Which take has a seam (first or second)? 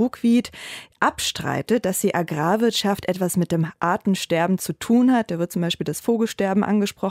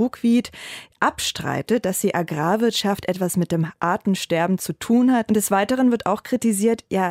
second